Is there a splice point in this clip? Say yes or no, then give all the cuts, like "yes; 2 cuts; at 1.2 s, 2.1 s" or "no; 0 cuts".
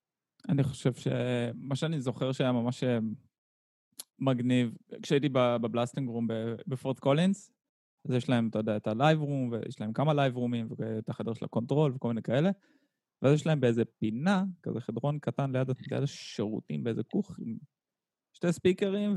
no; 0 cuts